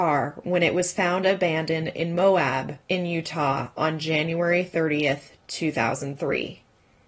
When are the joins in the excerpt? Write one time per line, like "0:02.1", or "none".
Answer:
none